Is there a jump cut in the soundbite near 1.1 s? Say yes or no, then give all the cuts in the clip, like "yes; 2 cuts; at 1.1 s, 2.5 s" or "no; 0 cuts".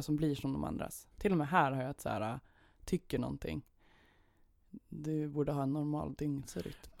yes; 1 cut; at 1.1 s